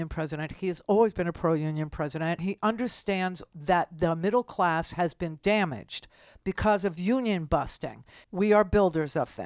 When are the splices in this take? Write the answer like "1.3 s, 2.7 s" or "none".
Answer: 2.4 s, 8.2 s